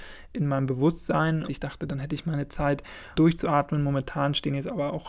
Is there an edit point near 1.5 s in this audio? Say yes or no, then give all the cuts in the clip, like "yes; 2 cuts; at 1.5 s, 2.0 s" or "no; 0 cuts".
yes; 2 cuts; at 1.5 s, 3.1 s